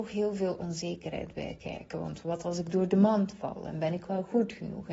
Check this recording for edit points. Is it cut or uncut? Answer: uncut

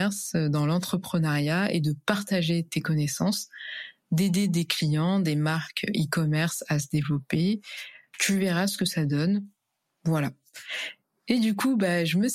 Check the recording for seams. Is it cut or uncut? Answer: uncut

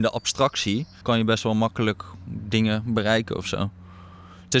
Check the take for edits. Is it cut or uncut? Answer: cut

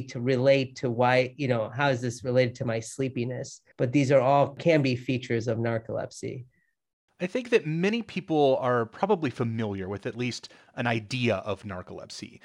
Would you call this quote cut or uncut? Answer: cut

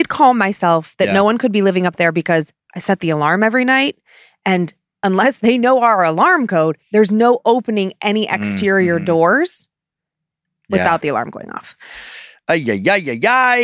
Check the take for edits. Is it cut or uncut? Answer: uncut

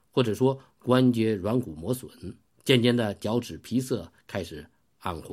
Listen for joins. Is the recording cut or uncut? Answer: cut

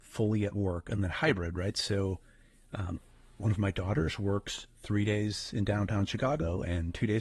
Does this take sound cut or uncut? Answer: uncut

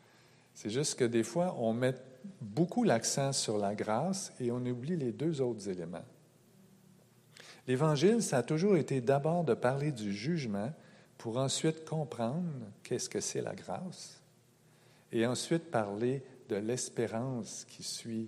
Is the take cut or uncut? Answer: uncut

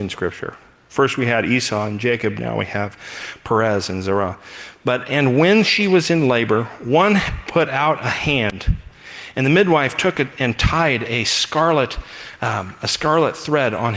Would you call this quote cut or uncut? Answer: uncut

